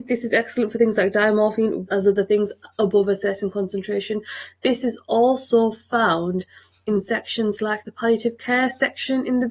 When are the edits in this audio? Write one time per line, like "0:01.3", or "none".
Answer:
0:01.9